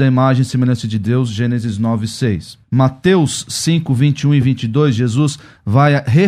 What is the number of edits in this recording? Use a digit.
1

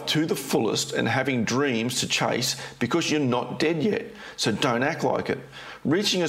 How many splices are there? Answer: 0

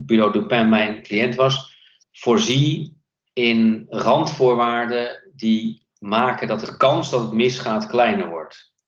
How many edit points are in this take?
1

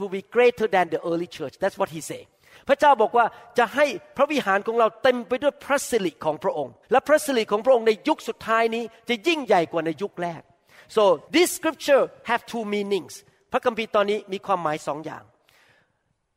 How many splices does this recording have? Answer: 2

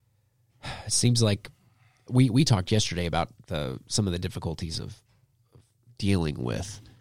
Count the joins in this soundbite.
0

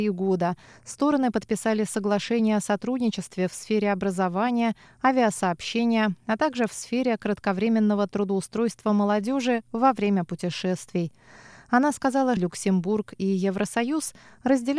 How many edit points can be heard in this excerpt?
1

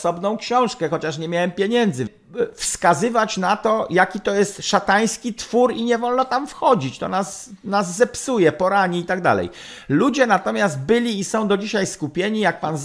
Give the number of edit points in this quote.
1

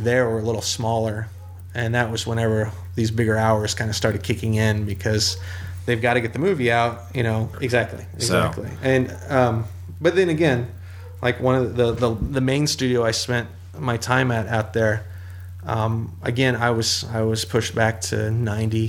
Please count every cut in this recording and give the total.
1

